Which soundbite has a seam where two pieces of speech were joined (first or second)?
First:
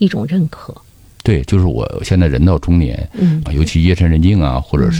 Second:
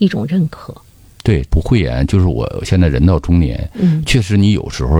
first